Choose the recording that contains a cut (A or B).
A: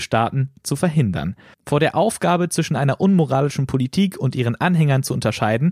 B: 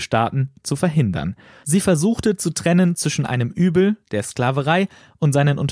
A